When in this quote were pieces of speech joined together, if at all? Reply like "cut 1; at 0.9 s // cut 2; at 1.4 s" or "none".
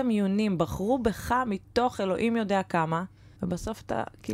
cut 1; at 3.4 s